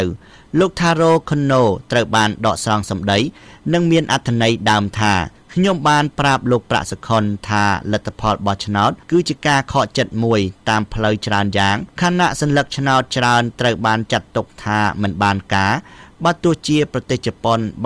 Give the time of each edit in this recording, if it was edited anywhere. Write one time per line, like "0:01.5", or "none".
0:09.0